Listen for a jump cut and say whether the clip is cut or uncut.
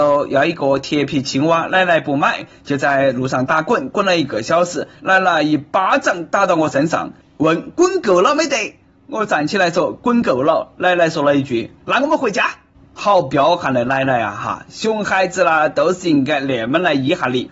uncut